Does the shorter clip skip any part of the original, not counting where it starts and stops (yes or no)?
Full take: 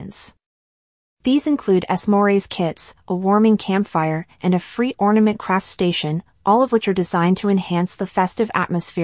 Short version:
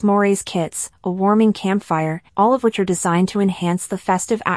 yes